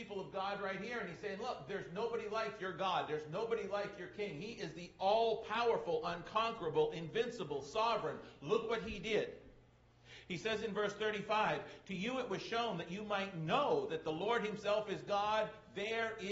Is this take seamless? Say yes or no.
yes